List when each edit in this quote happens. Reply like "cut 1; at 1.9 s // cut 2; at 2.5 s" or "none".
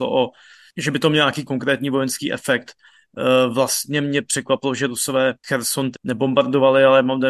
cut 1; at 1.4 s // cut 2; at 5.9 s

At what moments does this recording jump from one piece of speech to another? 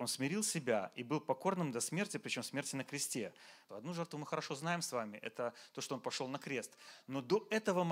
cut 1; at 3.7 s

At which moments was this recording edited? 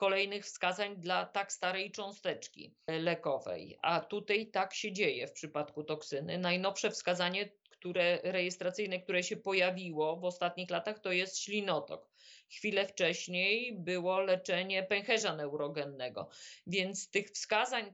none

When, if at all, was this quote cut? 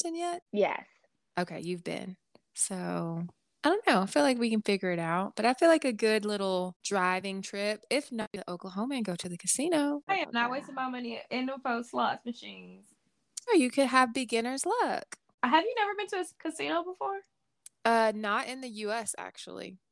cut 1; at 10.1 s // cut 2; at 13.5 s

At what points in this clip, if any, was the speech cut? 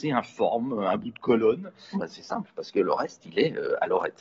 cut 1; at 1.9 s

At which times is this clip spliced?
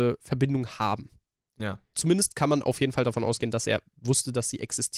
cut 1; at 1.9 s

